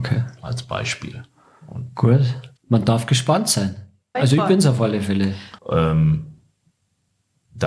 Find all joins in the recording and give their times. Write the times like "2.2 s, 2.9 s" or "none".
2.6 s, 4.1 s, 5.6 s